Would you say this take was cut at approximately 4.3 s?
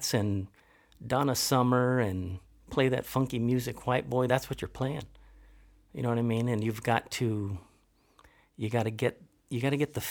yes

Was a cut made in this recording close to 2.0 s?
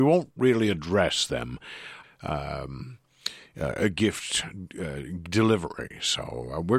yes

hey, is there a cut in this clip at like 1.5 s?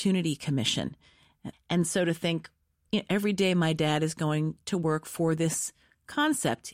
yes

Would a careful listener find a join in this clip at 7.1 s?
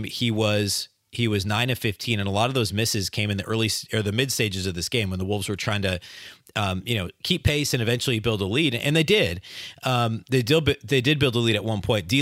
no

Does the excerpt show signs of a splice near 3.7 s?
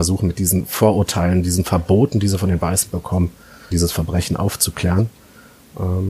yes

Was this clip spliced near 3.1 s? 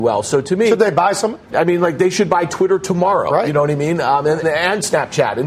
no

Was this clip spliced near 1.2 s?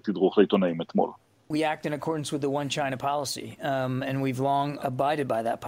no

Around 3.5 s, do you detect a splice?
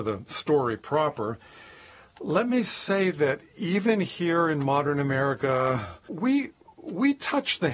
no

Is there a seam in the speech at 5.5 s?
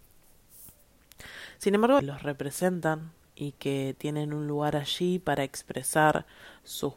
no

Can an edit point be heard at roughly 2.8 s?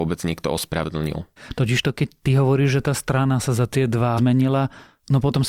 no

